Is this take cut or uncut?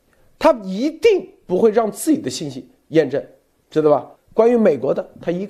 cut